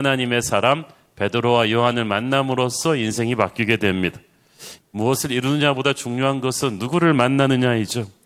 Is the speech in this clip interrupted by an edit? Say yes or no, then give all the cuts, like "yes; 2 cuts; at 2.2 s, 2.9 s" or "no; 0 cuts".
yes; 1 cut; at 4.8 s